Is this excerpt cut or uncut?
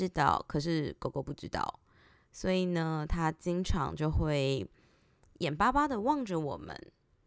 uncut